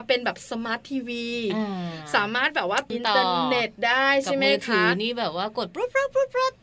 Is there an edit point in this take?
yes; 1 cut; at 2.9 s

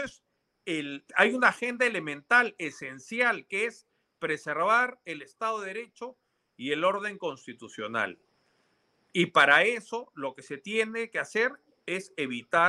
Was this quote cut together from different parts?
yes; 1 cut; at 1.1 s

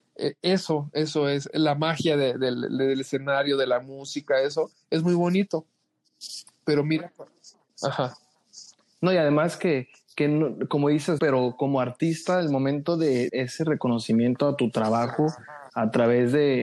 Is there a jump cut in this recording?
yes; 3 cuts; at 11.2 s, 13.3 s, 15.7 s

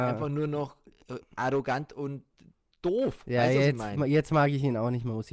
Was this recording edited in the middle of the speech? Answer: no; 0 cuts

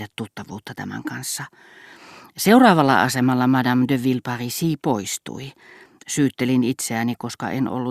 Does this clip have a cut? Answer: no; 0 cuts

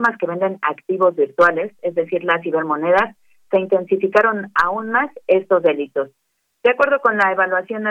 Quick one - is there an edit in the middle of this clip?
no; 0 cuts

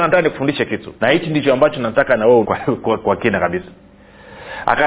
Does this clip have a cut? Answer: yes; 2 cuts; at 1.0 s, 2.4 s

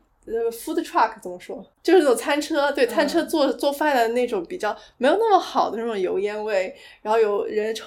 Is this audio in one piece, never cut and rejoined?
no; 1 cut; at 1.7 s

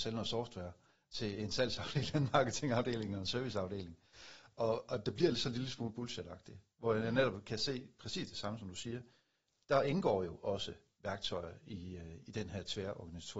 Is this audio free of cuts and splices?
yes; 0 cuts

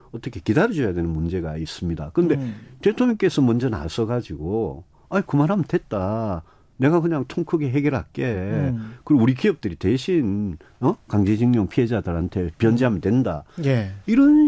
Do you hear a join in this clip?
no; 0 cuts

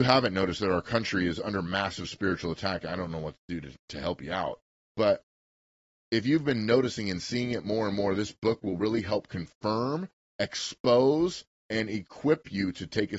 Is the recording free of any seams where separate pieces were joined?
yes; 0 cuts

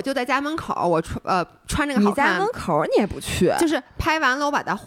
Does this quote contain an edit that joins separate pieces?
no; 0 cuts

